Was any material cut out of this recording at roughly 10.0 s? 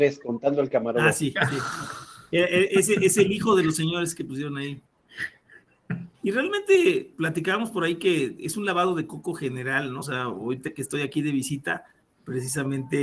yes; 2 cuts; at 6.1 s, 10.0 s

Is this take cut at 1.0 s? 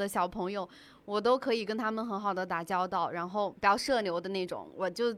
no; 0 cuts

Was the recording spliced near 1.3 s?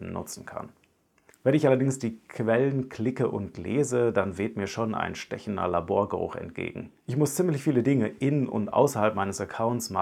yes; 2 cuts; at 1.3 s, 7.0 s

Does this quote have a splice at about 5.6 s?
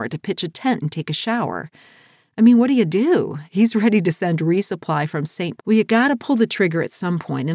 yes; 2 cuts; at 3.5 s, 5.6 s

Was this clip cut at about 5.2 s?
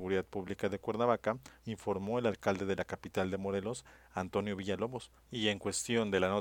yes; 2 cuts; at 1.6 s, 5.2 s

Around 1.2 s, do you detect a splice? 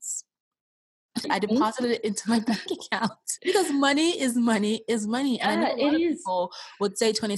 yes; 2 cuts; at 1.2 s, 3.4 s

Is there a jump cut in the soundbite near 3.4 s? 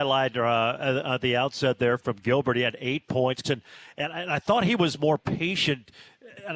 yes; 1 cut; at 3.4 s

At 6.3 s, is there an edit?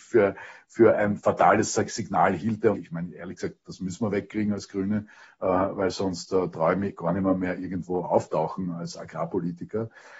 no; 1 cut; at 2.7 s

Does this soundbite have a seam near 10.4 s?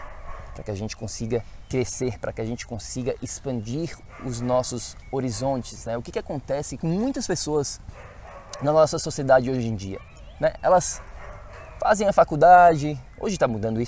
no; 1 cut; at 6.8 s

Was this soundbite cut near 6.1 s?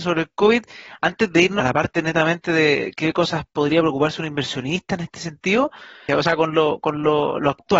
yes; 2 cuts; at 1.6 s, 6.1 s

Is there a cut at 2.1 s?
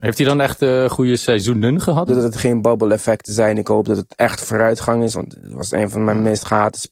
yes; 1 cut; at 2.1 s

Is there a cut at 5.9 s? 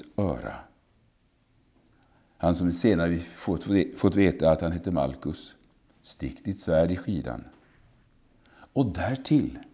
yes; 1 cut; at 5.9 s

